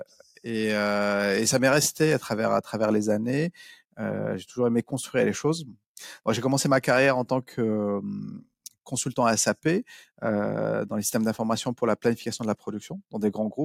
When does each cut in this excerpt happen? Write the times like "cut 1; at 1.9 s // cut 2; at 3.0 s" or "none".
none